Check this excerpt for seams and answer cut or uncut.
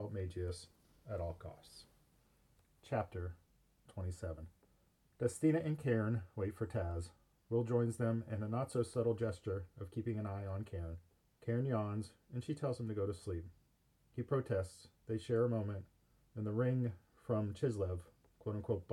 uncut